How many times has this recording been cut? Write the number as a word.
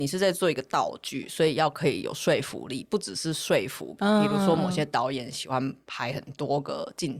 one